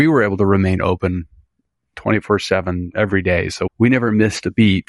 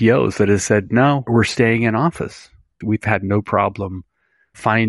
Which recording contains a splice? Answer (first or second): second